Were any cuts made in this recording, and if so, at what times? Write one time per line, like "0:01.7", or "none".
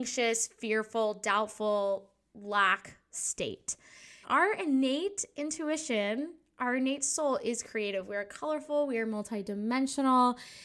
0:04.2